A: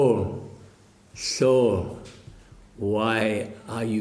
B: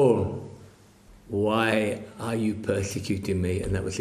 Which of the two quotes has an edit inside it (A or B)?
B